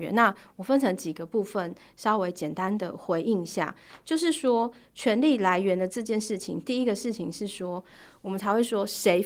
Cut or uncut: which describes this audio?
uncut